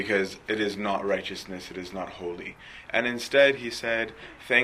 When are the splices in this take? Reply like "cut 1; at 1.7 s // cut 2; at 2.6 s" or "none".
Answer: cut 1; at 2.9 s